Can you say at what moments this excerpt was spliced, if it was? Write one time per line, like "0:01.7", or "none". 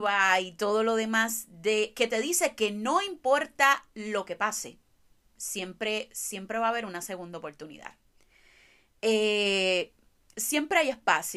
none